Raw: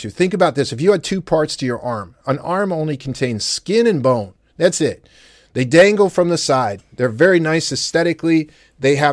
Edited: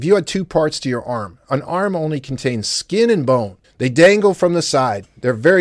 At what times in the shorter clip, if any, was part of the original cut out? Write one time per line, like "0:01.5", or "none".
0:03.6